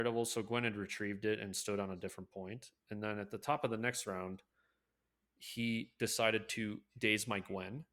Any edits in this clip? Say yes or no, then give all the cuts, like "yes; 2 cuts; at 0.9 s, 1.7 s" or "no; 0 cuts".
no; 0 cuts